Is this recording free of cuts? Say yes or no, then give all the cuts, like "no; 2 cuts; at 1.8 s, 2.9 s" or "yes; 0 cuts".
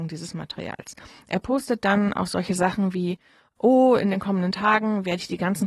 yes; 0 cuts